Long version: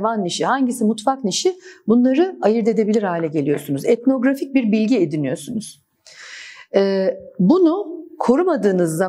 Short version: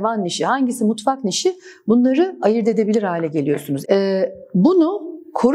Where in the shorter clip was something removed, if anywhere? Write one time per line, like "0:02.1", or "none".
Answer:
0:03.8